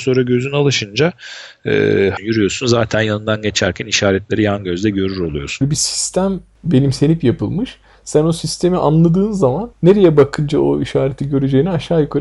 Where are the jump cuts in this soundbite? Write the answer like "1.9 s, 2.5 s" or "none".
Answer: 2.2 s, 5.6 s, 9.7 s